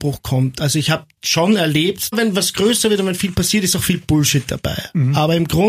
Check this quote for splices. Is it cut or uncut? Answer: cut